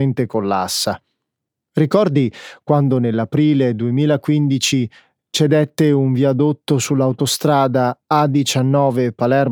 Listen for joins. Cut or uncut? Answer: uncut